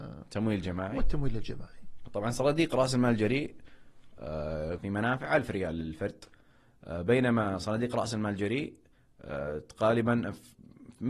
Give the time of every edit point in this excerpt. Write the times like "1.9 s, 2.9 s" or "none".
4.8 s